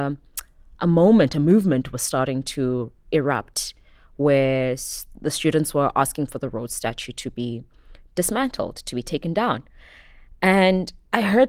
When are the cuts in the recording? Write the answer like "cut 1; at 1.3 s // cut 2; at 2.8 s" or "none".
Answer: none